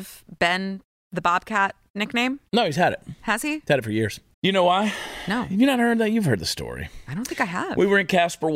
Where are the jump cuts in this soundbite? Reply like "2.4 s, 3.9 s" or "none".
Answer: 4.3 s